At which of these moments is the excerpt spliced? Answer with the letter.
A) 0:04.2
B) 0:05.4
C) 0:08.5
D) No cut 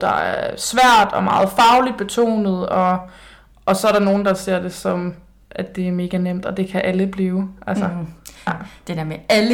C